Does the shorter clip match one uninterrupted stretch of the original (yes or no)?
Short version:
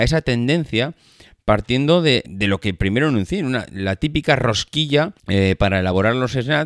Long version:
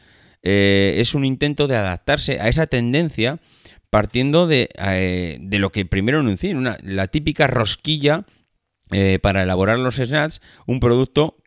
no